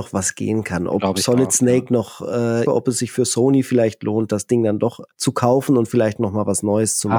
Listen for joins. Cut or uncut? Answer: cut